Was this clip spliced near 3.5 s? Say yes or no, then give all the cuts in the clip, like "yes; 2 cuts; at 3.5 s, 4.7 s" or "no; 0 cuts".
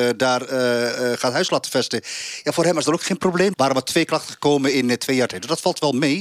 yes; 1 cut; at 3.5 s